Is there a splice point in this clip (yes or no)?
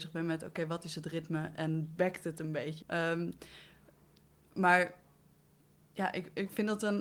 yes